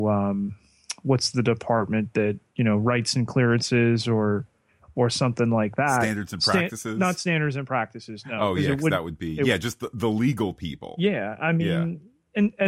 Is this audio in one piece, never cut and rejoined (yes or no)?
yes